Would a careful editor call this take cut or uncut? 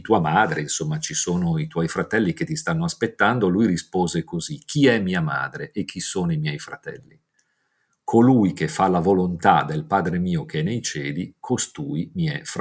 uncut